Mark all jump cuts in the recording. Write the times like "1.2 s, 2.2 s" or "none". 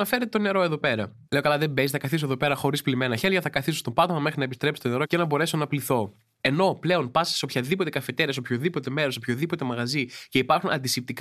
1.2 s, 6.4 s